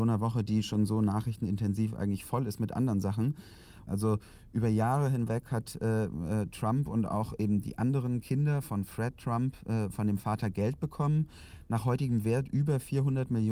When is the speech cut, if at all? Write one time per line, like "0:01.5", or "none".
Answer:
0:03.9